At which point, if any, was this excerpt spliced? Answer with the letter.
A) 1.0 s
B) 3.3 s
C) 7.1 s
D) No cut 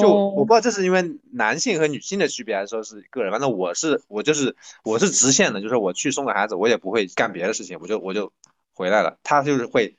C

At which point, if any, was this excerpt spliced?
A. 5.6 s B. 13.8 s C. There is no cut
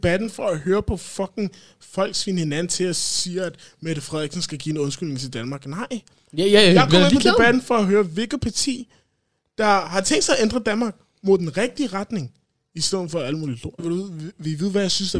B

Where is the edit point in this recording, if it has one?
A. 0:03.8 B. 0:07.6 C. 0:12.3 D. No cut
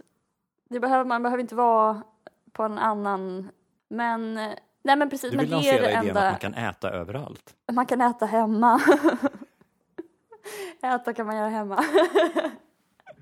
A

